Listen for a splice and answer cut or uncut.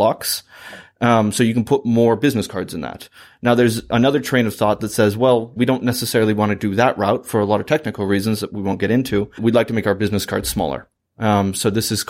cut